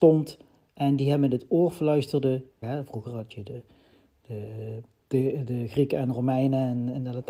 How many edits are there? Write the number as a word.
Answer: one